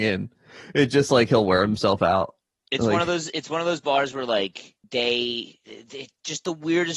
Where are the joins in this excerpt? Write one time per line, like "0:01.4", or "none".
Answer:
0:04.8